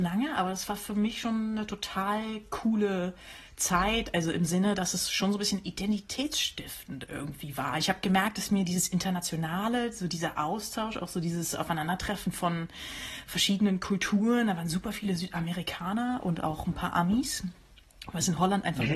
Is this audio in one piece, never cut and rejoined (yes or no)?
yes